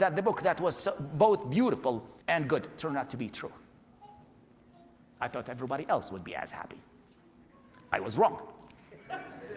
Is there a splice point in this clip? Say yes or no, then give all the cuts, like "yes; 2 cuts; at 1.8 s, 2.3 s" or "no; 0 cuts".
yes; 1 cut; at 2.2 s